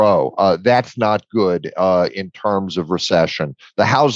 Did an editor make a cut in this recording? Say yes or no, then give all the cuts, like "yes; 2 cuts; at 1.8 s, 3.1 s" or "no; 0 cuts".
no; 0 cuts